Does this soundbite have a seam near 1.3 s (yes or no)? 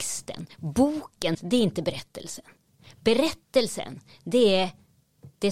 yes